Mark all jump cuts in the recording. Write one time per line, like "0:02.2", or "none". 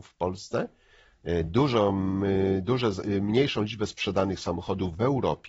none